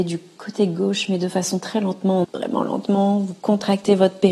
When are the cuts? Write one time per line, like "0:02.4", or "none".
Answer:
0:02.2